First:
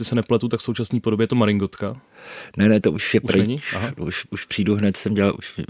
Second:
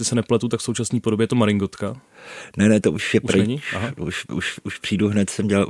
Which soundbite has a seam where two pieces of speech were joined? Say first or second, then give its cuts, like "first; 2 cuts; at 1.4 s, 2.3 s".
first; 1 cut; at 4.3 s